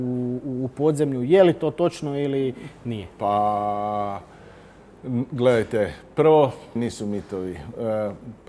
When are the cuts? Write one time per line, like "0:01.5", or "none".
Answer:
0:06.8